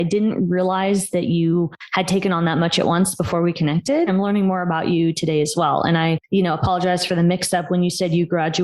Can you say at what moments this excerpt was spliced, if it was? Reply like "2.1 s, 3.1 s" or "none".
4.1 s